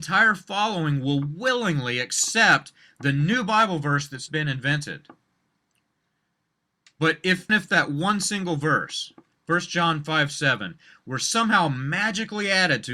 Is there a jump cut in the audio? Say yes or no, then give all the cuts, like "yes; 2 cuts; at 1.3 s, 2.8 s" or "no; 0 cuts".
yes; 2 cuts; at 4.3 s, 7.5 s